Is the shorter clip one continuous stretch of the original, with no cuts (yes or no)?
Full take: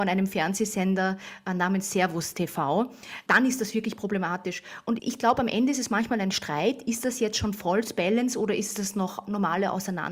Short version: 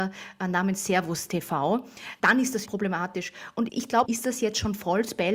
no